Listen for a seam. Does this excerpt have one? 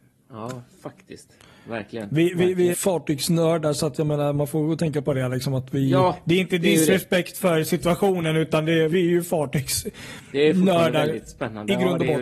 yes; 2 cuts; at 2.7 s, 8.9 s

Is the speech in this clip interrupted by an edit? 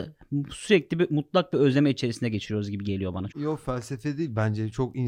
yes; 1 cut; at 3.3 s

